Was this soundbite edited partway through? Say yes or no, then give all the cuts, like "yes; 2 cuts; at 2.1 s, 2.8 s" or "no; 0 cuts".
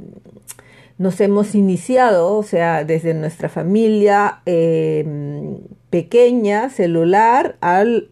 no; 0 cuts